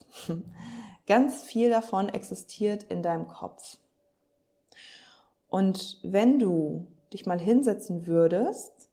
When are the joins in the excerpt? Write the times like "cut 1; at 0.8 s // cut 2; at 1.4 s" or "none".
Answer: none